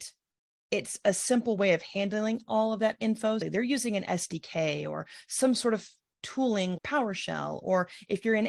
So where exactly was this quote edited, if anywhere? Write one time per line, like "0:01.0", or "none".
0:03.4
0:06.8